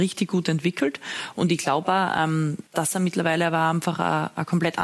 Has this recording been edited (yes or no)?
yes